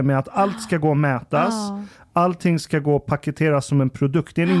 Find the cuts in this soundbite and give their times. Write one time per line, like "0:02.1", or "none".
none